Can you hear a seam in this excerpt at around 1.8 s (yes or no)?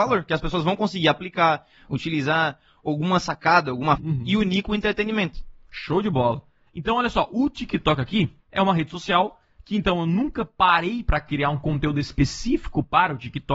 no